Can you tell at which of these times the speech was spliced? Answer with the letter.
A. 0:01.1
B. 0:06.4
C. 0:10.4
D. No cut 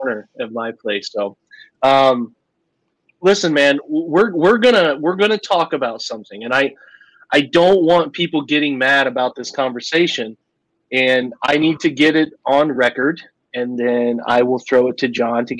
D